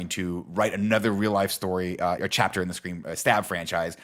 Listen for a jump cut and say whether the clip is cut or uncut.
cut